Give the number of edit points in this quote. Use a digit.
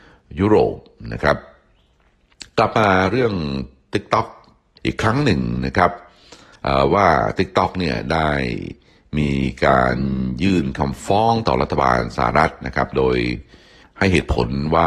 0